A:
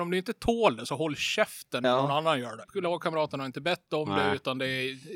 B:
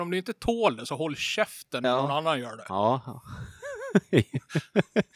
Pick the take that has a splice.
A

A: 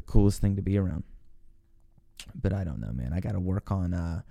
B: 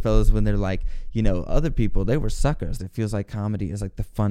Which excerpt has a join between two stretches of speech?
B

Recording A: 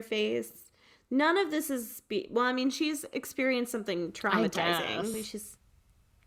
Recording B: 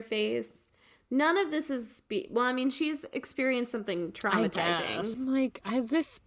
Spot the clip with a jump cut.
B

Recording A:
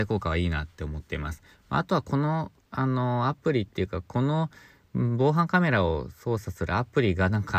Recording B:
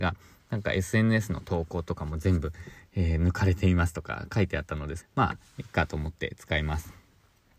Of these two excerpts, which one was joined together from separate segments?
B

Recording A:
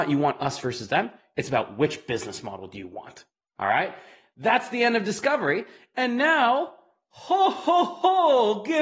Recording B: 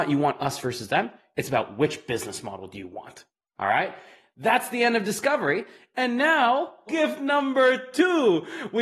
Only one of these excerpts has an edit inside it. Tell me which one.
B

